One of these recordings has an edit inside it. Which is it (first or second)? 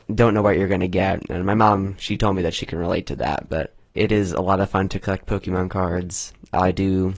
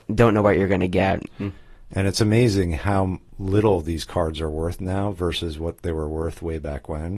second